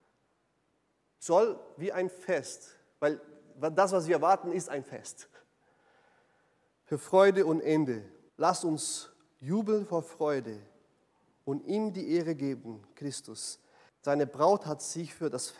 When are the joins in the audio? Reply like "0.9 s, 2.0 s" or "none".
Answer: 8.3 s, 13.9 s